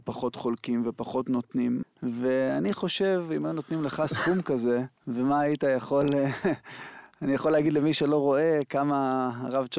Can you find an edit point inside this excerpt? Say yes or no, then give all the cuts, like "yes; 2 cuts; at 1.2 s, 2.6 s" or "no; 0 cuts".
yes; 2 cuts; at 1.8 s, 5.0 s